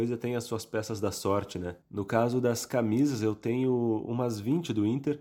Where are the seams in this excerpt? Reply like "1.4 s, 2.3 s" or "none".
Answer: 1.8 s

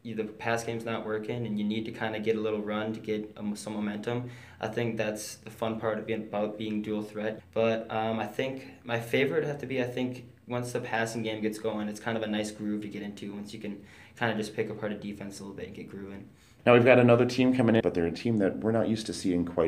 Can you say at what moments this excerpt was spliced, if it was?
7.4 s, 16.6 s, 17.8 s

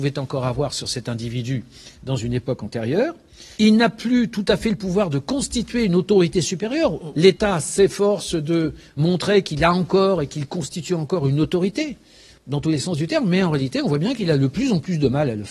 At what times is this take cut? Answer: 3.6 s, 7.1 s

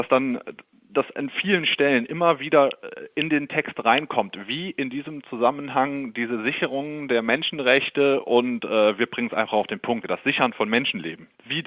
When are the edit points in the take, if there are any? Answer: 10.0 s

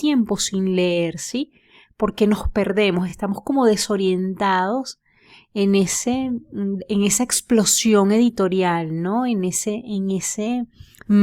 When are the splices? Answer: none

